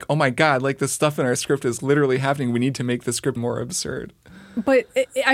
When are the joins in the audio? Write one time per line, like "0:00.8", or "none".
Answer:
0:01.8
0:03.4